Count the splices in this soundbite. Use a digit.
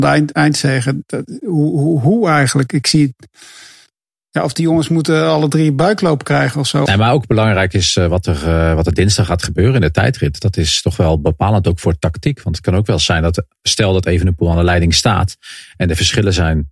1